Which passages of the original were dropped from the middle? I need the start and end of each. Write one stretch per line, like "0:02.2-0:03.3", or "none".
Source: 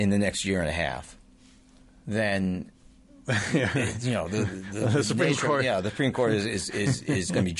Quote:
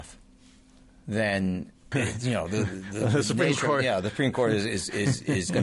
0:02.9-0:03.7